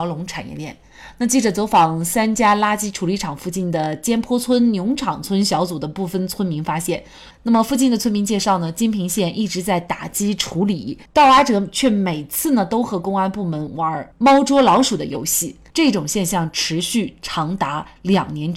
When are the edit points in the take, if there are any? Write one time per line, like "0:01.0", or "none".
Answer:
0:07.3
0:15.7